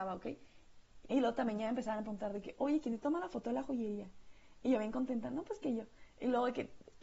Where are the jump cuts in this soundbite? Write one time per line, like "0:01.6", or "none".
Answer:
0:01.0

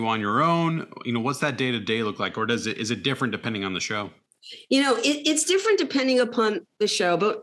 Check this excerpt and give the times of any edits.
none

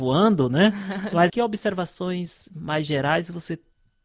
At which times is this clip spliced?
0:01.3

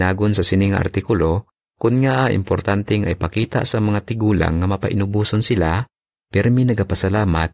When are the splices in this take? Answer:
0:06.2

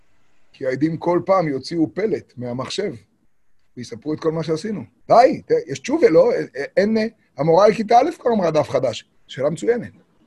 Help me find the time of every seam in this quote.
0:04.9
0:09.1

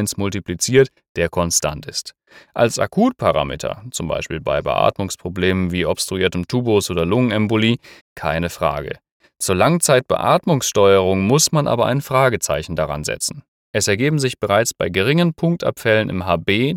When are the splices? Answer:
0:08.0
0:13.6

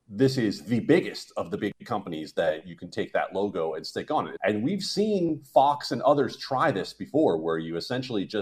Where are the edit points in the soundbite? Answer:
0:04.4

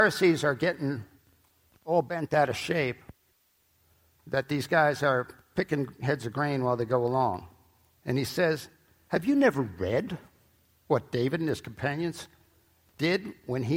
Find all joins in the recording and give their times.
0:07.9

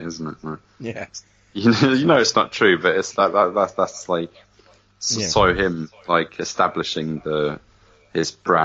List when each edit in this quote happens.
none

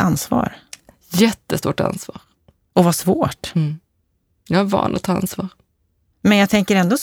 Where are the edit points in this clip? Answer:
none

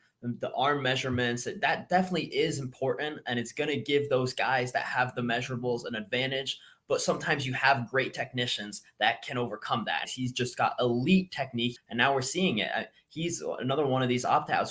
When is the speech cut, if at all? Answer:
0:10.0
0:11.8

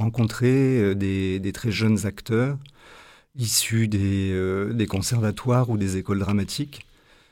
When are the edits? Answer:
none

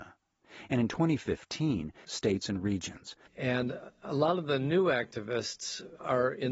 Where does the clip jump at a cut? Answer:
0:02.1
0:03.3

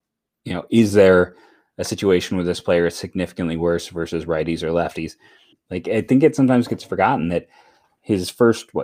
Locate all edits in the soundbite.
0:05.5

